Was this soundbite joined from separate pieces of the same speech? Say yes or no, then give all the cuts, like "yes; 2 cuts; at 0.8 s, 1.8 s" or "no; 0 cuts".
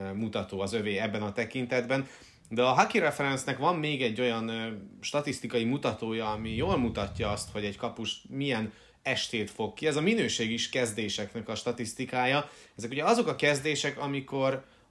no; 0 cuts